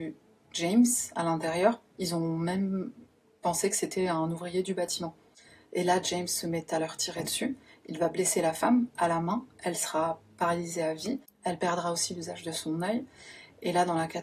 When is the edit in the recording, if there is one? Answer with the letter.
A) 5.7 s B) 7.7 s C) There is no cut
C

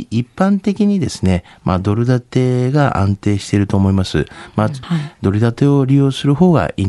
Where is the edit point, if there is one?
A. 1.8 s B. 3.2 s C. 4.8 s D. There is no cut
C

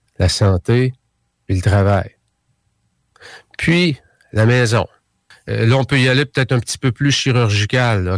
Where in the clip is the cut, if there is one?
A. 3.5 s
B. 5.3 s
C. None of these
B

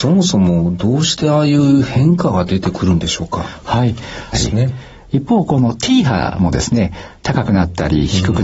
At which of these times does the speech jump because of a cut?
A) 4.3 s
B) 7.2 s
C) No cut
A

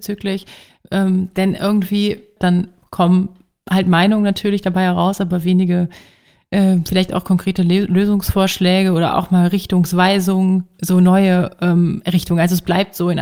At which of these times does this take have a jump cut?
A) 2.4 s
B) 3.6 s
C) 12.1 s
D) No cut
A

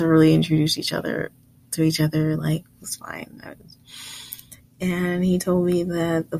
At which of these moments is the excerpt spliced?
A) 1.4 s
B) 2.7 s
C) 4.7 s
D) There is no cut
D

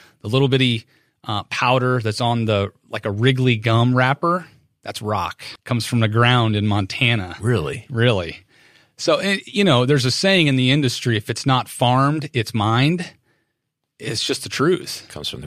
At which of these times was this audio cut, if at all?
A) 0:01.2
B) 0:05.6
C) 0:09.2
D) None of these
B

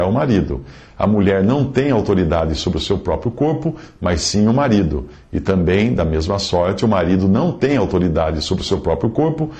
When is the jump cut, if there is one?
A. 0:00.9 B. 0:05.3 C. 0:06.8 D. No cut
D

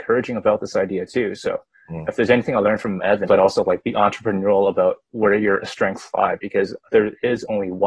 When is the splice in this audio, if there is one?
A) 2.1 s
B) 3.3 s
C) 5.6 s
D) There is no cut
B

